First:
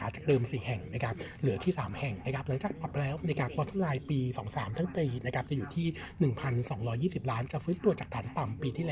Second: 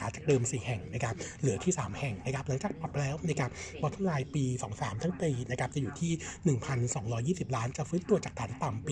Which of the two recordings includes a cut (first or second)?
first